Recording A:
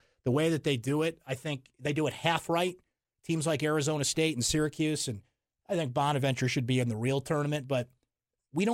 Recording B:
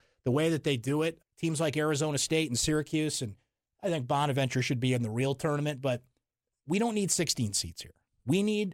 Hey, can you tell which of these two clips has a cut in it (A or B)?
B